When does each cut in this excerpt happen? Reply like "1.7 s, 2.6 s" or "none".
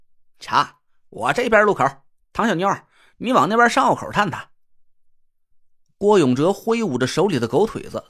none

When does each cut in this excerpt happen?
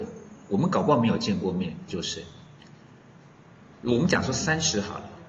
1.9 s

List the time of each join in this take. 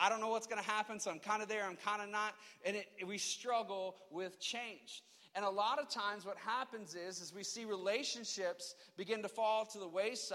none

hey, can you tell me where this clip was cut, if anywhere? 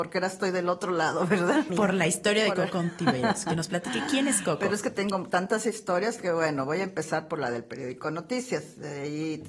1.7 s

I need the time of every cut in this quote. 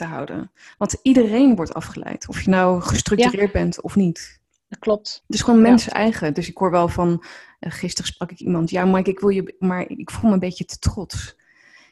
9.6 s

